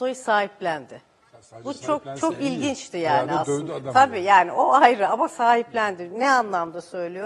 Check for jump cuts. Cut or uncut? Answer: uncut